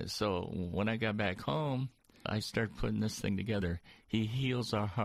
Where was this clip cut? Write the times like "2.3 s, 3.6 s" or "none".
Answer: 2.3 s

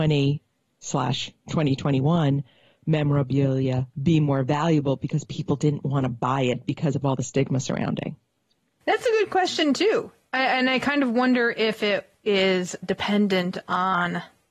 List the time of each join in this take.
12.8 s

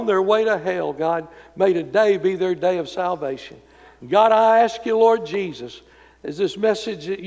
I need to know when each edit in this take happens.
none

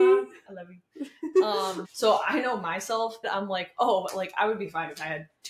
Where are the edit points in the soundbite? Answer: 1.8 s, 3.2 s

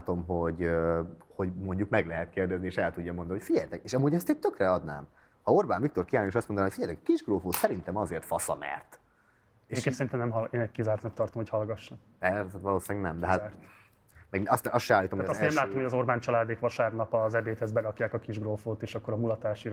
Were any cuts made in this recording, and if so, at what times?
none

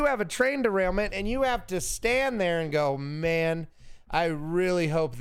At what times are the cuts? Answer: none

